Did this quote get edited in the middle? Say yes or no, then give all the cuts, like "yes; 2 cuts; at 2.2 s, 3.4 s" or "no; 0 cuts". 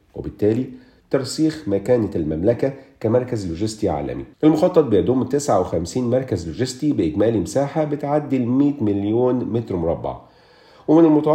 yes; 1 cut; at 4.3 s